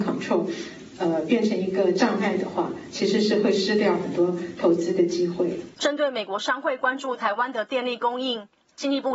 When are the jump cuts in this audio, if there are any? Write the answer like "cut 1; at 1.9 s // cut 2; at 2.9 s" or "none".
cut 1; at 5.7 s